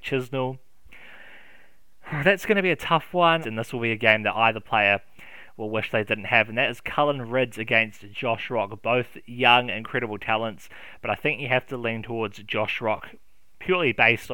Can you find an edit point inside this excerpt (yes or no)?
yes